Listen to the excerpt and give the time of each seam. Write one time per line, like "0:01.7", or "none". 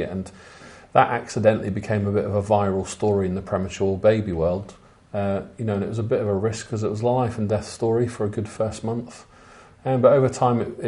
none